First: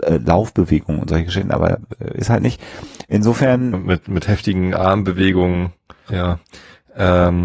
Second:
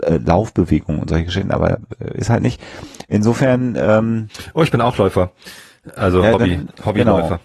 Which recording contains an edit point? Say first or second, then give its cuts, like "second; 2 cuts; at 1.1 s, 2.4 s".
first; 2 cuts; at 3.7 s, 6.1 s